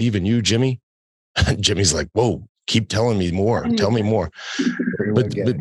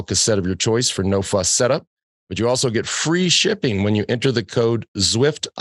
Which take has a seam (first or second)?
second